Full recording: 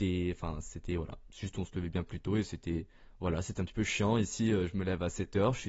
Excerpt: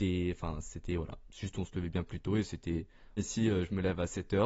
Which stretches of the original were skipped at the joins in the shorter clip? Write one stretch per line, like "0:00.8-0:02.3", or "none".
0:03.2-0:04.2